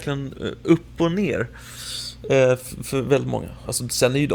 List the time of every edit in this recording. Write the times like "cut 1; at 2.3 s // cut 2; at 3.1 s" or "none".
none